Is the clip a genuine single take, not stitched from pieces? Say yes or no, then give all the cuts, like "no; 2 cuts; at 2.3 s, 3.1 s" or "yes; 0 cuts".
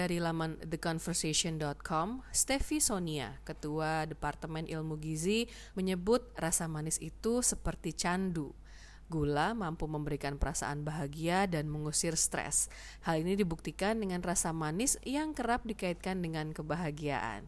no; 1 cut; at 5.7 s